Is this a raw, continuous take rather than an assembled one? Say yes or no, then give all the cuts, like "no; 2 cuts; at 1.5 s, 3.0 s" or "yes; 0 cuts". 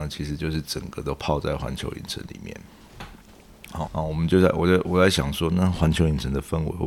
no; 1 cut; at 3.9 s